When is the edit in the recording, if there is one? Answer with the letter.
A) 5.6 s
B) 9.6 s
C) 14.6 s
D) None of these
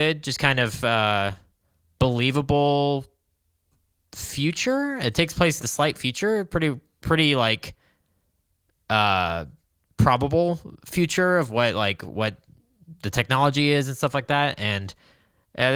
A